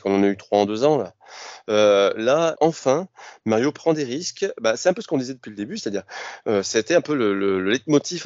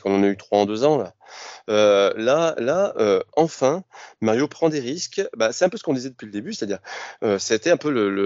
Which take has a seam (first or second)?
first